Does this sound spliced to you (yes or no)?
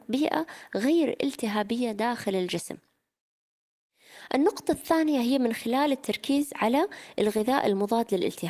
no